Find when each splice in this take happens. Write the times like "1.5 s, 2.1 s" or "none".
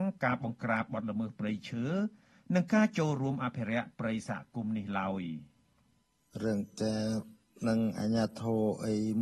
none